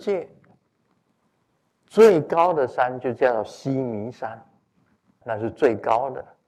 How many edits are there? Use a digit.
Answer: 1